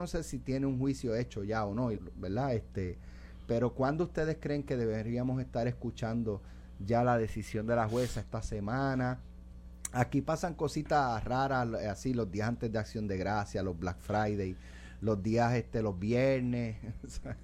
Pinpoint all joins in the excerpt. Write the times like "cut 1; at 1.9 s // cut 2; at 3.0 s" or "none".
cut 1; at 2.0 s // cut 2; at 3.5 s

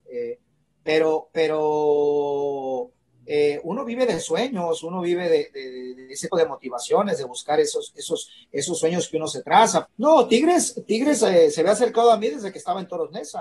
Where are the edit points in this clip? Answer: cut 1; at 6.3 s // cut 2; at 9.8 s

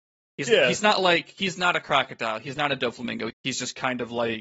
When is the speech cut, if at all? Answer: cut 1; at 3.3 s

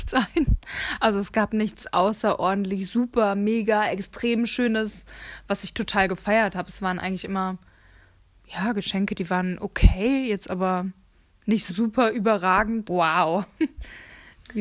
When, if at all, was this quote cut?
cut 1; at 11.7 s // cut 2; at 12.9 s

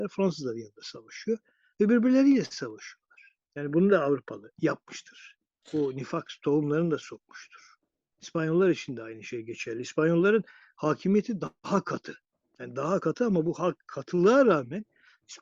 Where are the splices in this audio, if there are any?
none

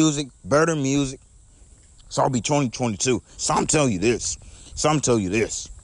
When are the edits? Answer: cut 1; at 2.0 s // cut 2; at 3.4 s // cut 3; at 4.7 s

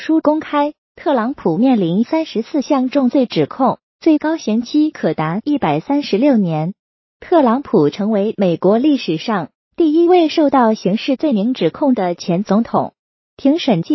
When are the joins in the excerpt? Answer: none

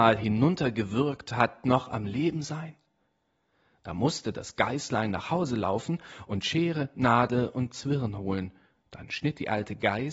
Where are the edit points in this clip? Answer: none

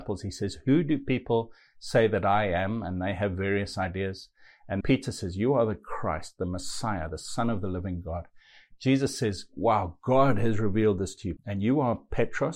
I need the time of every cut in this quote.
cut 1; at 4.8 s // cut 2; at 11.4 s

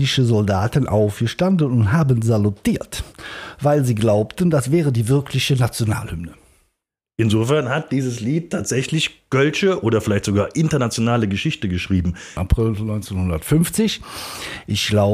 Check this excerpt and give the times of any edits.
cut 1; at 12.4 s

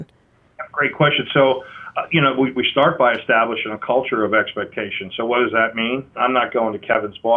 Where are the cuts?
cut 1; at 6.2 s

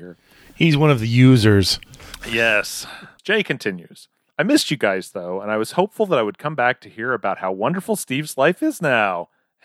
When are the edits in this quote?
none

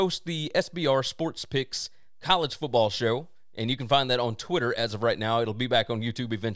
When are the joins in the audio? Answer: none

